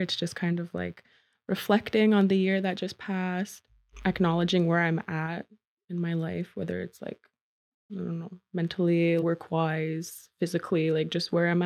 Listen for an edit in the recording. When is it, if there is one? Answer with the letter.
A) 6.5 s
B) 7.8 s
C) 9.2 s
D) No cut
C